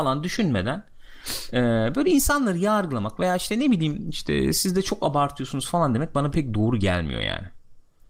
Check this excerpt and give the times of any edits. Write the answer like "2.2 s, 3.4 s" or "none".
6.3 s